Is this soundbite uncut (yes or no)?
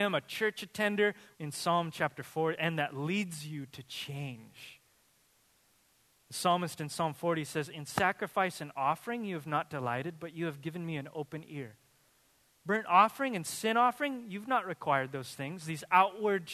no